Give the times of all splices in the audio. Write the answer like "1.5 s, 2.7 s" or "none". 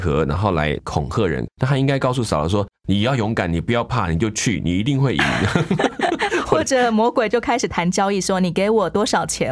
1.5 s